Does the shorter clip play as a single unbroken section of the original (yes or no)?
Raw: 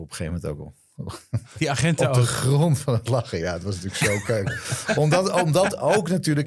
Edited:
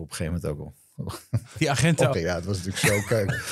no